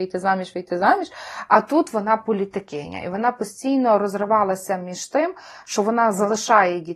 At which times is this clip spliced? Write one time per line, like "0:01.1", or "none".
none